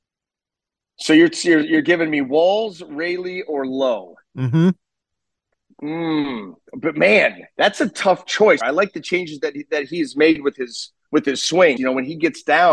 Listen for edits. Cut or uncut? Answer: cut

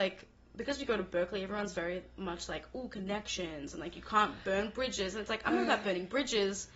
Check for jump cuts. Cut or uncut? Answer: uncut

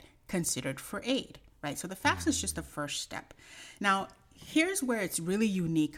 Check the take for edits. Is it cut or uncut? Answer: uncut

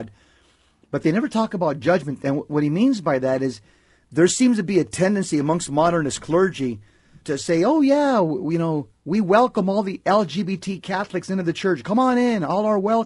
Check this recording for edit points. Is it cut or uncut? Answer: cut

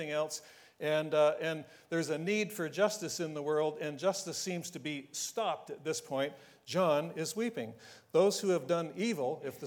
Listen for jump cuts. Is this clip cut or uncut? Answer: uncut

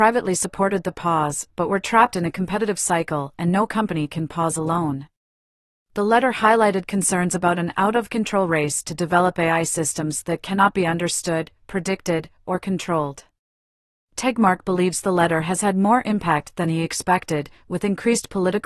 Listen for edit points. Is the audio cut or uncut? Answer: uncut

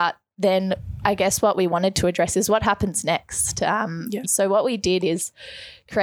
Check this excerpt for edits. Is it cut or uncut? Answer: cut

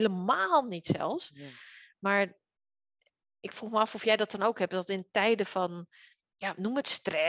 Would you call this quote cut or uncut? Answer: uncut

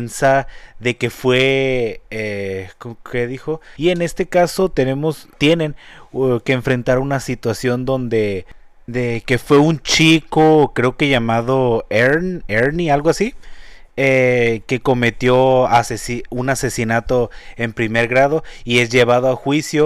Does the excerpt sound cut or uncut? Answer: cut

